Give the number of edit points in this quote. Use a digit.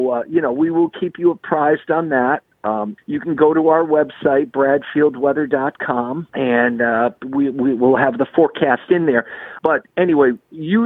3